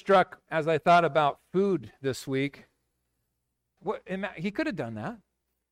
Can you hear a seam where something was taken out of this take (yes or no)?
yes